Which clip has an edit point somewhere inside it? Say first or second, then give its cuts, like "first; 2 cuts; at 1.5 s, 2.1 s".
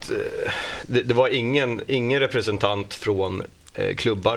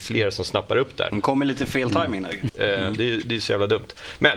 second; 2 cuts; at 1.1 s, 2.5 s